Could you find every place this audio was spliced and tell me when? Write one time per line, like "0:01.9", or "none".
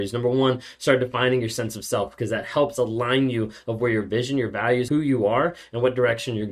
0:04.9